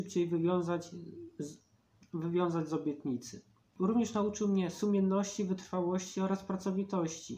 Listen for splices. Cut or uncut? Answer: uncut